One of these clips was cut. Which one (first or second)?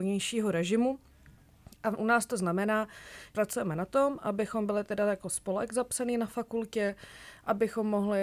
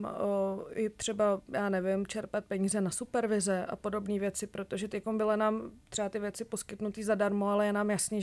first